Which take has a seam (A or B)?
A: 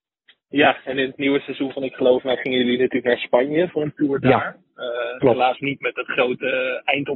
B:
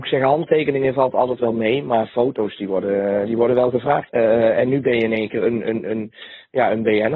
B